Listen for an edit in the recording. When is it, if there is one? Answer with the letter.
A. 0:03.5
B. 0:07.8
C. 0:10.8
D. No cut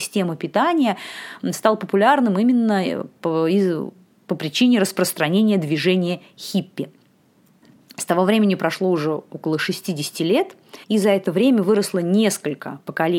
C